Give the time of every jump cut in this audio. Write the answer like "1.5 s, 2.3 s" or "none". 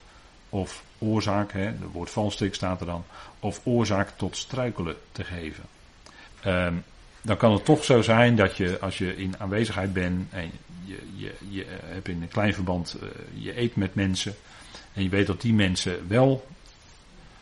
6.3 s